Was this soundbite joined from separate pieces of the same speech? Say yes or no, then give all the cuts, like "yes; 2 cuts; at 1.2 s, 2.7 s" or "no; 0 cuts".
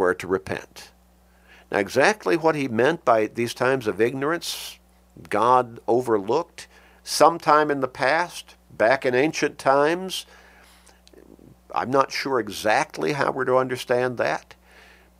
no; 0 cuts